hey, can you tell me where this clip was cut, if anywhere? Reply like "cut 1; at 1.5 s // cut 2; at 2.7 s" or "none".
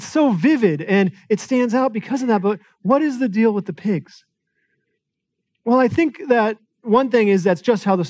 none